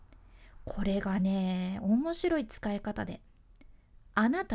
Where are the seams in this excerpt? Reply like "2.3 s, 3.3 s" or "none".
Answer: none